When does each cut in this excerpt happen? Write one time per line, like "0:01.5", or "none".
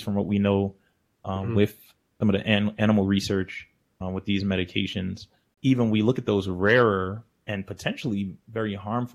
0:05.5